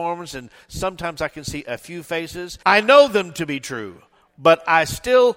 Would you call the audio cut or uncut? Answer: cut